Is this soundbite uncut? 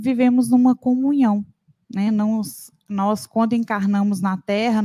yes; 0 cuts

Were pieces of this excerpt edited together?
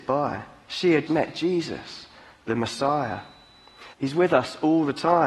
yes; 2 cuts; at 1.1 s, 3.9 s

